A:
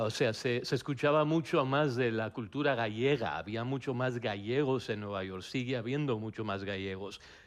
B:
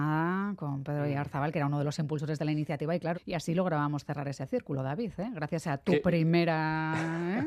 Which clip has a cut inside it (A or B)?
B